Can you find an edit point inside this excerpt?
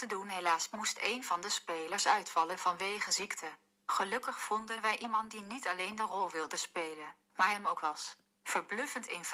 no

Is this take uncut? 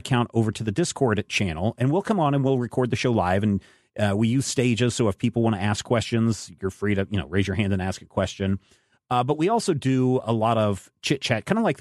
yes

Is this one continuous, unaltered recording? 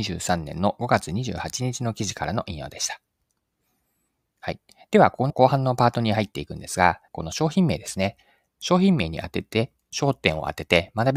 no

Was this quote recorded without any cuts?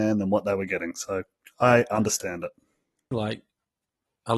no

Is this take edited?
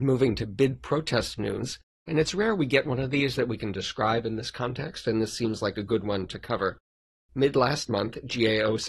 no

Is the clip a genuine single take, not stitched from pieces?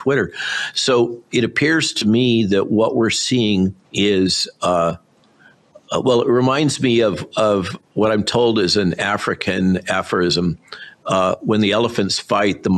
no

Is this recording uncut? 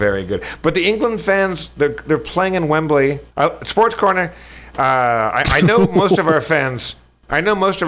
no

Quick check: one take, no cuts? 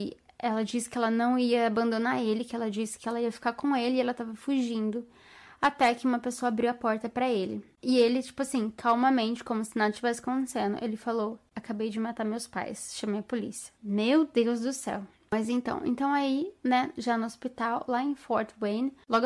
yes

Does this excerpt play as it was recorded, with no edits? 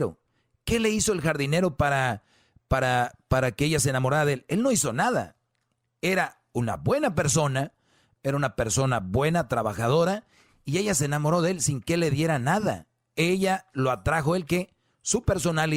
no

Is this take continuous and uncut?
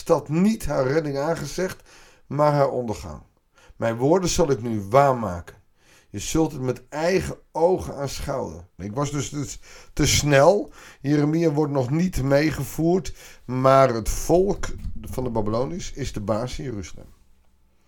no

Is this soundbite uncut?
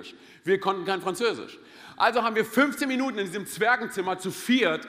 yes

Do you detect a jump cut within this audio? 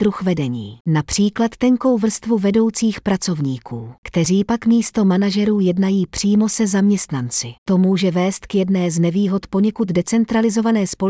yes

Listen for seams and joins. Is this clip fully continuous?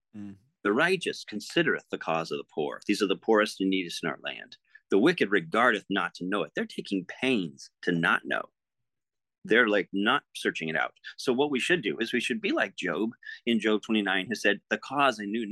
no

